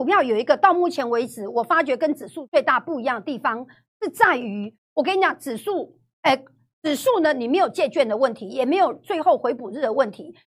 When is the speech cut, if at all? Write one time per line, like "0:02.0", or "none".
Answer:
none